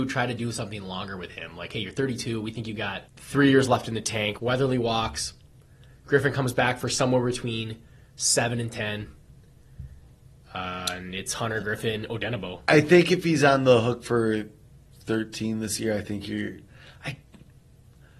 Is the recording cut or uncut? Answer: cut